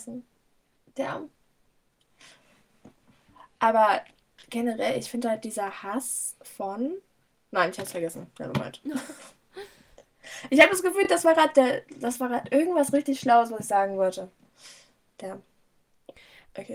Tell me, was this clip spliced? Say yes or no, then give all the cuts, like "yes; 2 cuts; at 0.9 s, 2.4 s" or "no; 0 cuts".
no; 0 cuts